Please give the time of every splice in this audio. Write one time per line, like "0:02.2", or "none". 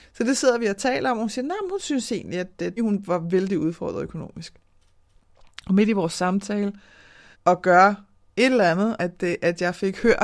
0:02.8
0:07.3
0:09.0